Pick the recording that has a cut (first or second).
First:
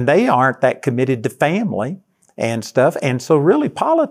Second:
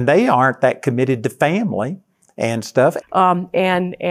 second